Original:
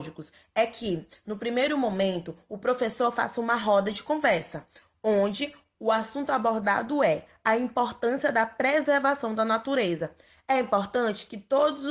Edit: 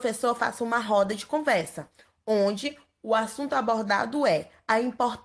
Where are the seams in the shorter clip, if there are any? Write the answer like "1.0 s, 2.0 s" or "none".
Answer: none